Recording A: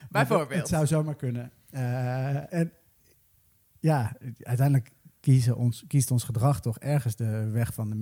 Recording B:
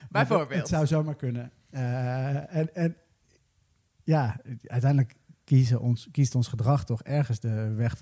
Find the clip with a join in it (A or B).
A